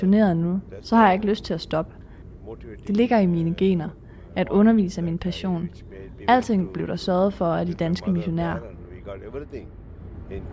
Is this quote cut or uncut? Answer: cut